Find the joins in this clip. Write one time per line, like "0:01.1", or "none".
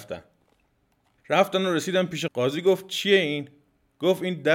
0:02.3